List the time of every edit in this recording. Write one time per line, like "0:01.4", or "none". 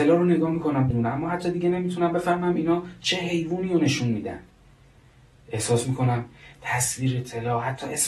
0:00.9